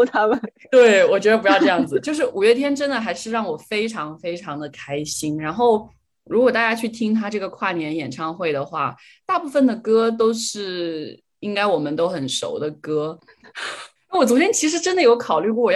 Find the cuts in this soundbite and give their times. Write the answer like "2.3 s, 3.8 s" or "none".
13.2 s

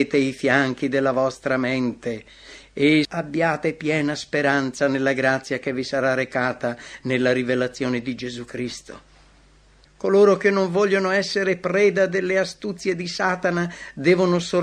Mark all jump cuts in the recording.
3.0 s, 9.9 s

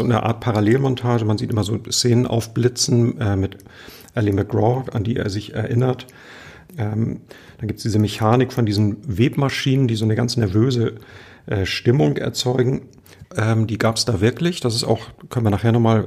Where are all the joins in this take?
6.7 s, 13.2 s

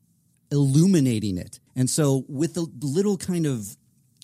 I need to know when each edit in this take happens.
1.7 s

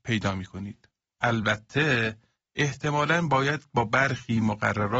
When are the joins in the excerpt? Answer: 1.2 s

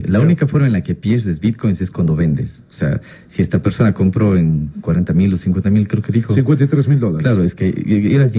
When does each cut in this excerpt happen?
none

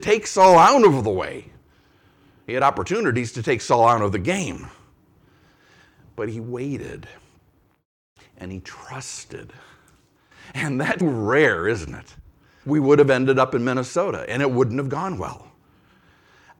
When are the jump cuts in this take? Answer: 11.0 s, 12.6 s

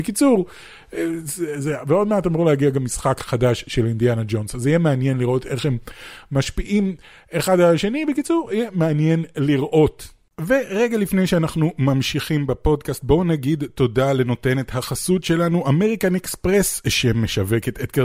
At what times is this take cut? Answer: none

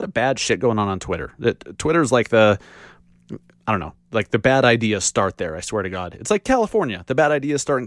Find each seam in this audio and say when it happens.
none

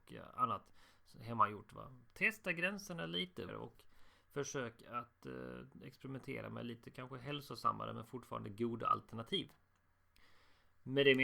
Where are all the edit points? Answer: 2.1 s, 3.5 s

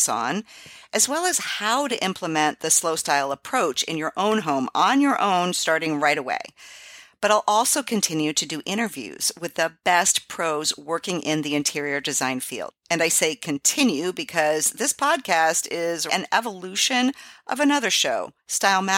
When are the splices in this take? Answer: 16.1 s

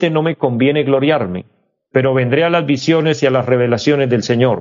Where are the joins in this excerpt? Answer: none

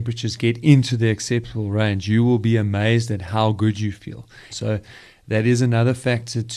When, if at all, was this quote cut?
4.5 s

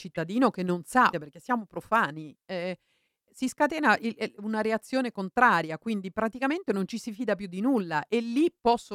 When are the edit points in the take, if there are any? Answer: 1.1 s

